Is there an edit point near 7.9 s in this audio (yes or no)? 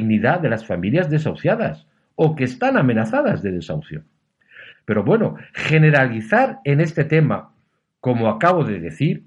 no